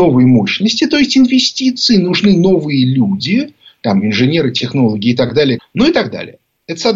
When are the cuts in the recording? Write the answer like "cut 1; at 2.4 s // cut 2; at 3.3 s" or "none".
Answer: cut 1; at 5.6 s